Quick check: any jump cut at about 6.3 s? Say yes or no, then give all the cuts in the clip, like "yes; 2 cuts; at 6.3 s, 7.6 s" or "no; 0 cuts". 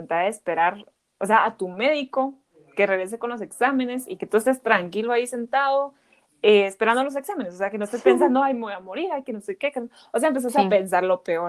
no; 0 cuts